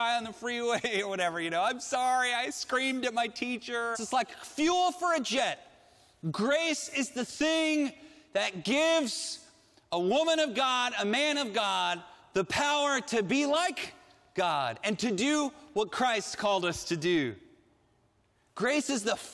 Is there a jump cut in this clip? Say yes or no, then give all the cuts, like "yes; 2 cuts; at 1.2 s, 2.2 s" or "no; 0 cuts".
yes; 1 cut; at 3.9 s